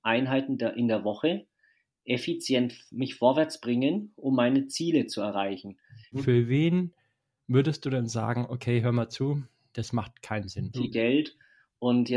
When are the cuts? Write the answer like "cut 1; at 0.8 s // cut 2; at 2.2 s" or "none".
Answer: cut 1; at 6.1 s // cut 2; at 9.7 s // cut 3; at 10.7 s